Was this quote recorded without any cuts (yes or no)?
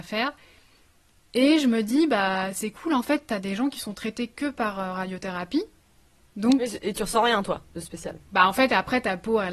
yes